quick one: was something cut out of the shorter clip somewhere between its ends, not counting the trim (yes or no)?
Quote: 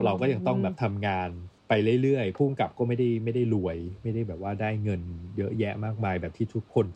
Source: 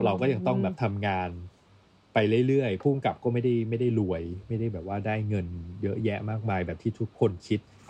yes